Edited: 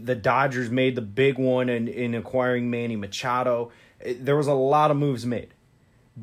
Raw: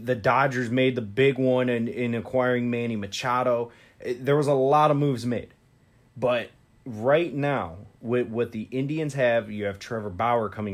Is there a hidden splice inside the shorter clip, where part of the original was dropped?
no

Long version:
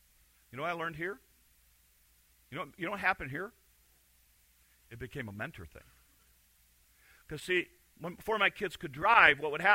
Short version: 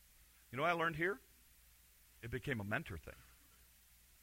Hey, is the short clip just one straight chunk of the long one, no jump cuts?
no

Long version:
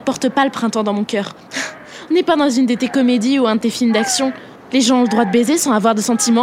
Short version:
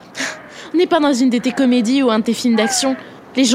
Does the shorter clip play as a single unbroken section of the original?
yes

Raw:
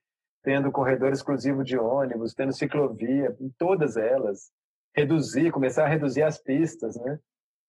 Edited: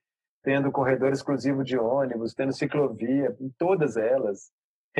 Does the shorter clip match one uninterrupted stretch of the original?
yes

